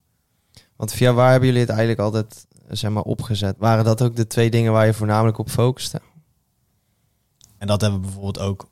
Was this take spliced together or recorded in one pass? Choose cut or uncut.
cut